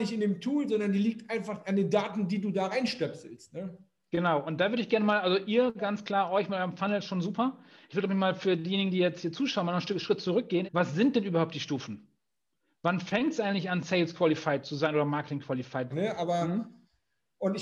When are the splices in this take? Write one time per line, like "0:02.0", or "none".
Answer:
0:10.6
0:15.9